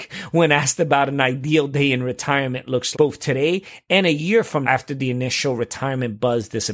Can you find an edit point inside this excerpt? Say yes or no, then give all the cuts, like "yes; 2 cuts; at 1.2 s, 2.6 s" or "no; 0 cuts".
yes; 2 cuts; at 2.9 s, 4.6 s